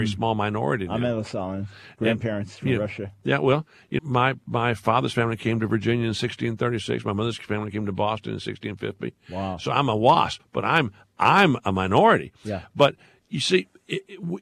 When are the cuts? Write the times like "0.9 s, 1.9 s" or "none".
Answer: 4.0 s